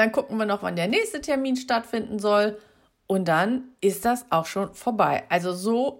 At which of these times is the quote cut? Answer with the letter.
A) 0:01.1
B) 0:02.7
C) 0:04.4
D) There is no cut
D